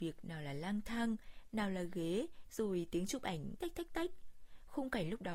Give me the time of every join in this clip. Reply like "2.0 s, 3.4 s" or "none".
2.5 s, 3.6 s